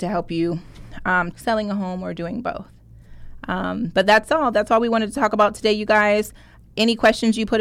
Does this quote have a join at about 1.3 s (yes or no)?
yes